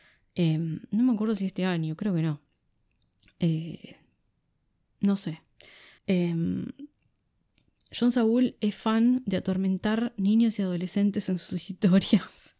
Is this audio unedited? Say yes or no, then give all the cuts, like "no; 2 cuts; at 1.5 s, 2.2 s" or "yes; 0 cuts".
no; 1 cut; at 6.0 s